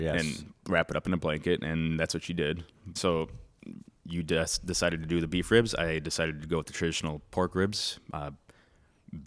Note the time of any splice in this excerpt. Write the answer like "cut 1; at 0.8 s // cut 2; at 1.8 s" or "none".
cut 1; at 3.0 s